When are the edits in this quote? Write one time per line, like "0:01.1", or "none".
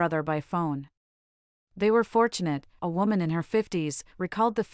0:02.8